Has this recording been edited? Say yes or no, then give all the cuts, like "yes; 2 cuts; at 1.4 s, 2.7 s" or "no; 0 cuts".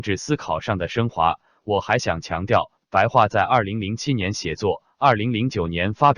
no; 0 cuts